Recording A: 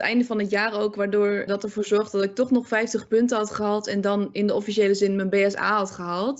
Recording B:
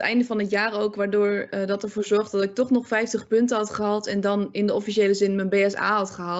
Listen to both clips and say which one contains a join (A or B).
A